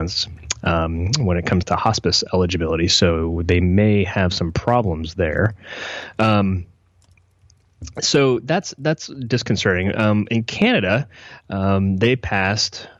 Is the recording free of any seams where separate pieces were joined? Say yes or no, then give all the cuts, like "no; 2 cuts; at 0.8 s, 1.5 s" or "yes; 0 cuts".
yes; 0 cuts